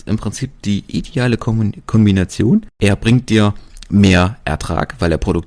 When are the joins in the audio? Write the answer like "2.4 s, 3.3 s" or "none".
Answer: 2.7 s